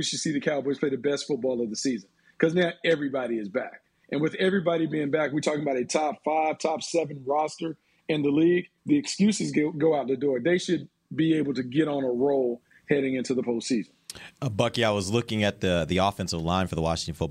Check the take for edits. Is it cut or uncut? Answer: cut